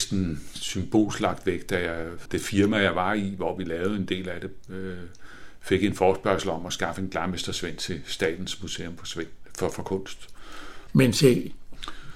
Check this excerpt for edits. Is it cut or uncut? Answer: cut